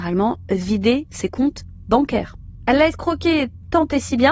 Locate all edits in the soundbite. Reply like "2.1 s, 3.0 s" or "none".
none